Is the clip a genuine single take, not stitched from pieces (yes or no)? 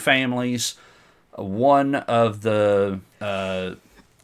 no